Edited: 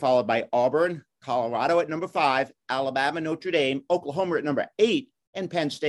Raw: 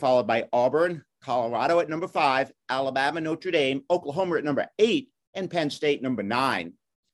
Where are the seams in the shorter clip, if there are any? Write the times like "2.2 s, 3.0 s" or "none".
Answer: none

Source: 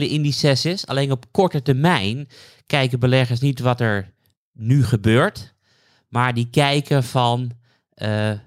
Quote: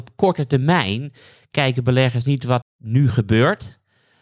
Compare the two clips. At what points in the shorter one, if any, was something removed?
2.6 s

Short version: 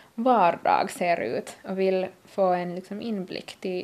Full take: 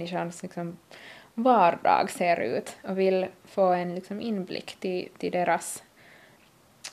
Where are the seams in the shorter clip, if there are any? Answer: none

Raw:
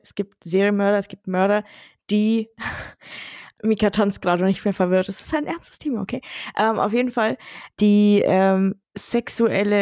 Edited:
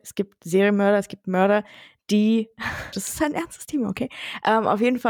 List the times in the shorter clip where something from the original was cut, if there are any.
2.9 s

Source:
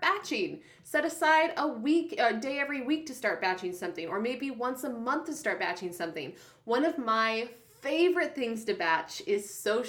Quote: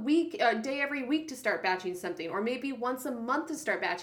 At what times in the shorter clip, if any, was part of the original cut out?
none

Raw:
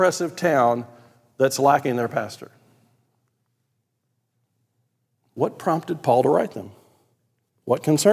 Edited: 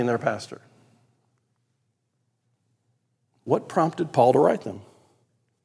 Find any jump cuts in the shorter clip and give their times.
none

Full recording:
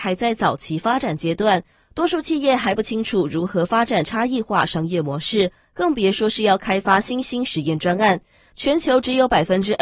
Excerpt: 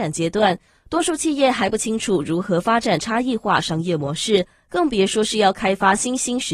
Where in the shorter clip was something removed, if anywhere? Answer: none

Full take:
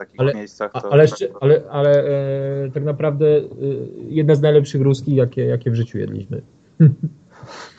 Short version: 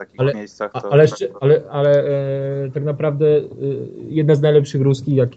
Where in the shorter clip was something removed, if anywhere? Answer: none

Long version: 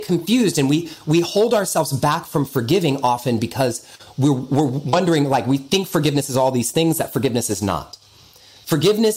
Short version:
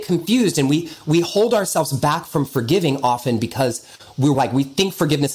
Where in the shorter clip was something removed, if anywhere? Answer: 4.3 s

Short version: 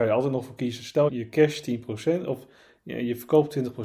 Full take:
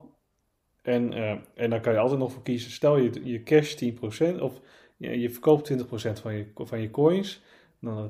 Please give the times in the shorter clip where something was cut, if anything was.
1.1 s

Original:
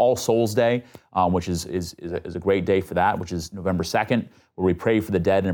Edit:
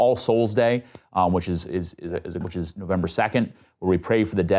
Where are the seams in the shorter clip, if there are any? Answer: 2.4 s

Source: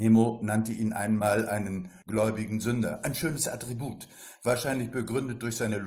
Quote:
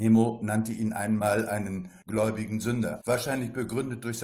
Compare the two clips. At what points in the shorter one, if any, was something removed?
3.0 s

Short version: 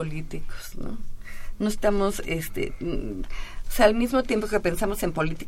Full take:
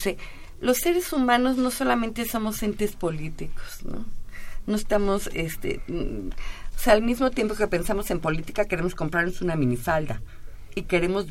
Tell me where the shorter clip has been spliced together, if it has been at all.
none

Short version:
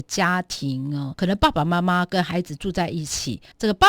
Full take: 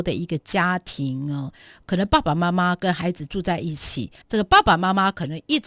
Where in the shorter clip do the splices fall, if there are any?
1.1 s

